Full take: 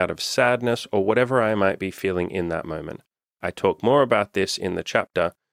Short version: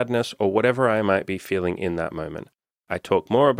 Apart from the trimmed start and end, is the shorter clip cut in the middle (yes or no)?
no